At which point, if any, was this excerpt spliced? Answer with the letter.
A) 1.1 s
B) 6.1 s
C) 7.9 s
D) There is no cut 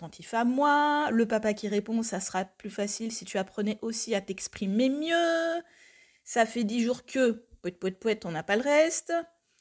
D